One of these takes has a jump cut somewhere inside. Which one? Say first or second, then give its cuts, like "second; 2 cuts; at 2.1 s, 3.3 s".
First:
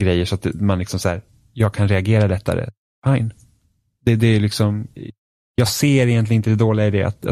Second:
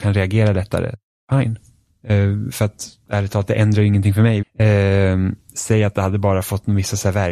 second; 2 cuts; at 2.0 s, 4.4 s